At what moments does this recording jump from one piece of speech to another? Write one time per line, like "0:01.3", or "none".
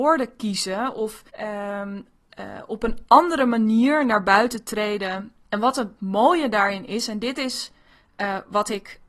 0:01.3
0:05.5